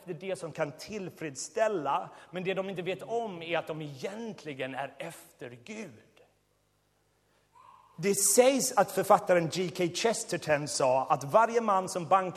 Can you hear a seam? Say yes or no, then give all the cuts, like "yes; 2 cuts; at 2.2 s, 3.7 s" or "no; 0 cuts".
no; 0 cuts